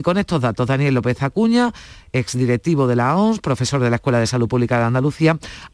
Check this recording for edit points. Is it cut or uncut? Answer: uncut